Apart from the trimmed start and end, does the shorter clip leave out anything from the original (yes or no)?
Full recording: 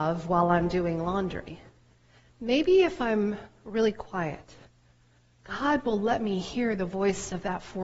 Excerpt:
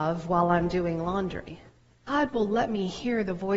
yes